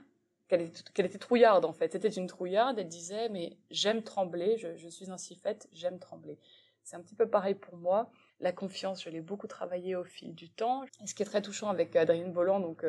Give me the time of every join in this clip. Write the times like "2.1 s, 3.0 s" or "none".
8.3 s, 10.9 s